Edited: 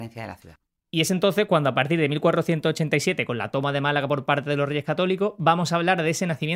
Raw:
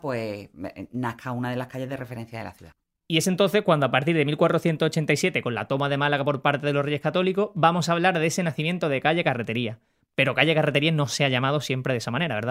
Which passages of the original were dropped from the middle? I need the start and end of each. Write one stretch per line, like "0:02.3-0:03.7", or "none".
none